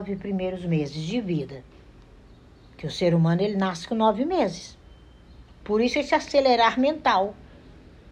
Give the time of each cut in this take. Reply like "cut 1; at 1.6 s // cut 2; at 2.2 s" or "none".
cut 1; at 5.6 s